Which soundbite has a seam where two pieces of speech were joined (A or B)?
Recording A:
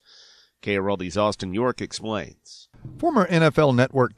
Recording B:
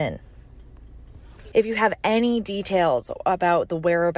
B